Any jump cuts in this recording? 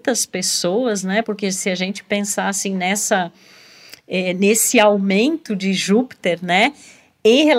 no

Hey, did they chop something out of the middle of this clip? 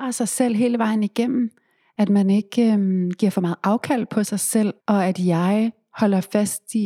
yes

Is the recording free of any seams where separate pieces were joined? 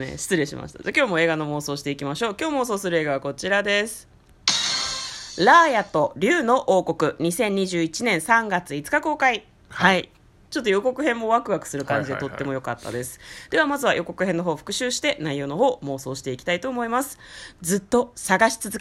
no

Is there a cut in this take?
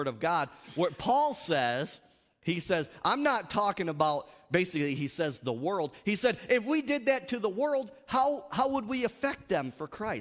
no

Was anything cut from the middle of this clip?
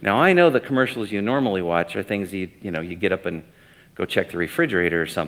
no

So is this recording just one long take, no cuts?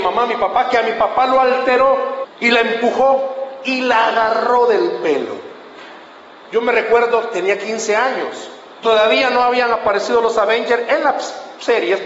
no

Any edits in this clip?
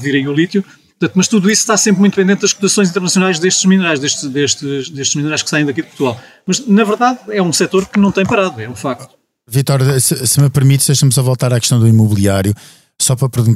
no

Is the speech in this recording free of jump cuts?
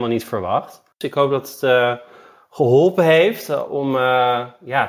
yes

